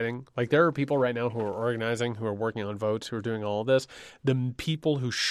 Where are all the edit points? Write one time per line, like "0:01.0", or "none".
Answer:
none